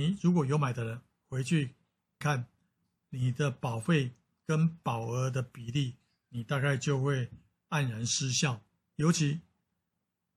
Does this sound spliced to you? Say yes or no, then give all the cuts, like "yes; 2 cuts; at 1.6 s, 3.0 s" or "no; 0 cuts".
yes; 2 cuts; at 2.2 s, 8.8 s